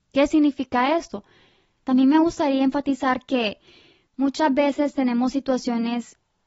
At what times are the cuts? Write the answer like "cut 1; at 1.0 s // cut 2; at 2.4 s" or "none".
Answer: cut 1; at 1.8 s